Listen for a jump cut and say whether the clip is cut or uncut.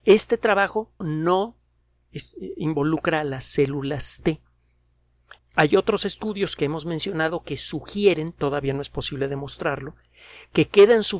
cut